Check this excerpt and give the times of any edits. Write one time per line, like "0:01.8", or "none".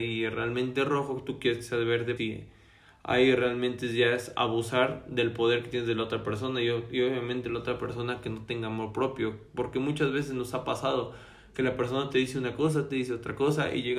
0:02.2